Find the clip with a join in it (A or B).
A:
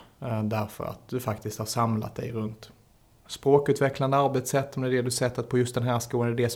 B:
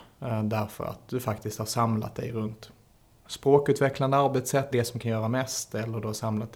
B